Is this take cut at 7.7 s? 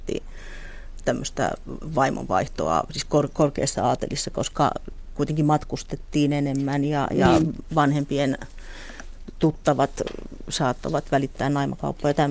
no; 0 cuts

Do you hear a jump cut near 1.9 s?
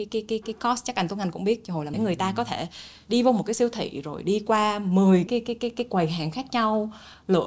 yes; 2 cuts; at 1.9 s, 5.3 s

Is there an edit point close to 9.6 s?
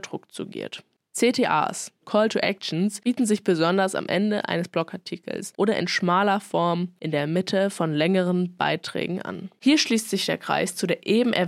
yes; 2 cuts; at 2.0 s, 9.6 s

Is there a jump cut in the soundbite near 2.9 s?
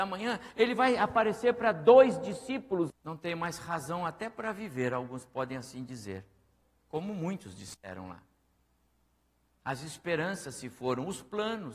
yes; 1 cut; at 2.9 s

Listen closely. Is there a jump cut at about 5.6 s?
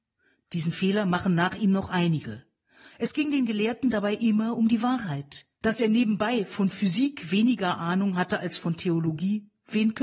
yes; 2 cuts; at 2.9 s, 5.6 s

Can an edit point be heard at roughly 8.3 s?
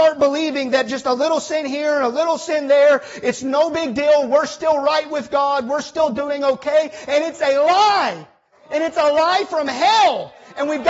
no; 0 cuts

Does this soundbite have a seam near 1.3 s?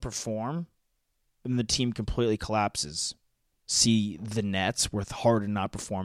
no; 1 cut; at 3.5 s

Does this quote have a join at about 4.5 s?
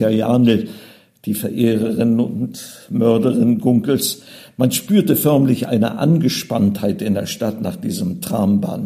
no; 0 cuts

